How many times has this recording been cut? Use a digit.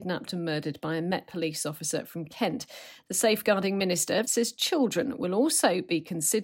1